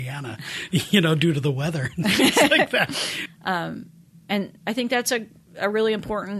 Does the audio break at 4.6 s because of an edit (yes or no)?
yes